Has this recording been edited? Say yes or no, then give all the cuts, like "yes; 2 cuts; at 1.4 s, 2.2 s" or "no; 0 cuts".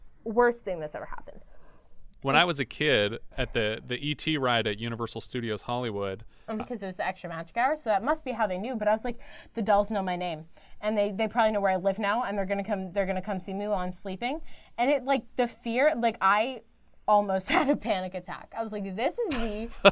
yes; 2 cuts; at 3.3 s, 6.6 s